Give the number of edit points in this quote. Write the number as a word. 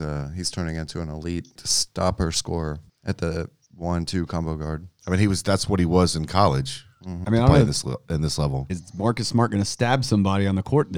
two